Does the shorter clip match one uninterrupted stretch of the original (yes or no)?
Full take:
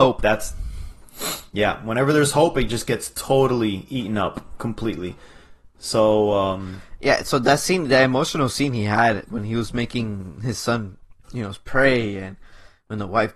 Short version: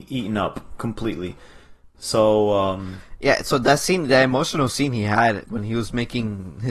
yes